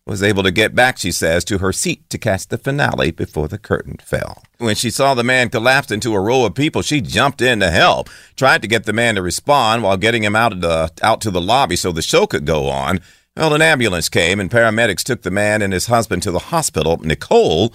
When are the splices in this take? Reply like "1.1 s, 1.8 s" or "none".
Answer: 4.6 s